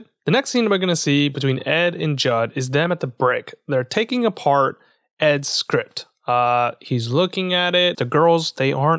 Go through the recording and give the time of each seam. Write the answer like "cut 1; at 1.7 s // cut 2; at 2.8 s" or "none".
cut 1; at 7.9 s